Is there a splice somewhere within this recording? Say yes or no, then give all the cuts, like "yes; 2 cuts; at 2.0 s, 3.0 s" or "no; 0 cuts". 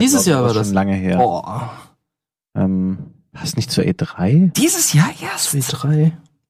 no; 0 cuts